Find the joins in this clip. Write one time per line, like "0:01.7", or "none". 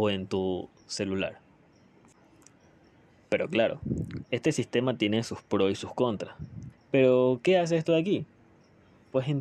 0:04.2
0:06.7

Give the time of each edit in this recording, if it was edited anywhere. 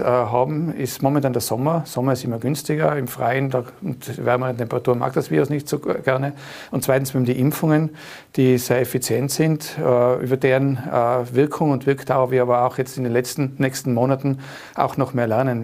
none

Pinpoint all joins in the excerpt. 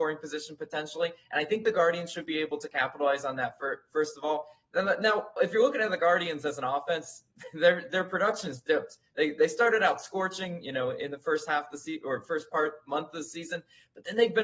none

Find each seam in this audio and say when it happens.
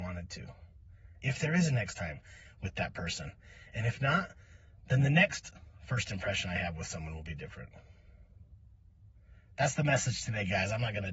0:01.2

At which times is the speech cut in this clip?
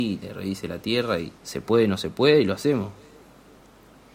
0:01.4

